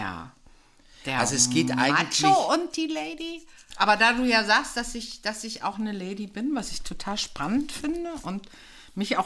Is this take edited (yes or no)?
yes